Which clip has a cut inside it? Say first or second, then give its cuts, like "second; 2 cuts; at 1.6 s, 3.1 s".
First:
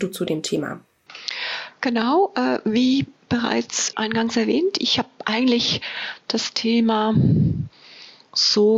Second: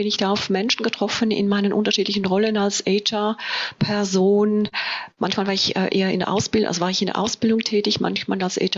first; 1 cut; at 3.9 s